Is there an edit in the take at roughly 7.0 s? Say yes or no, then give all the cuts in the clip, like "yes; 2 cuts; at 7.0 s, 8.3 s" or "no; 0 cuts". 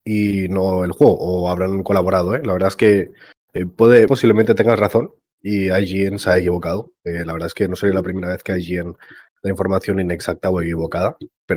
no; 1 cut; at 4.1 s